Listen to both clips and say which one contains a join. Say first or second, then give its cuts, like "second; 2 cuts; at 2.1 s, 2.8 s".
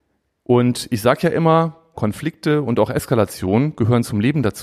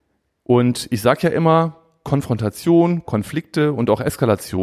first; 1 cut; at 1.9 s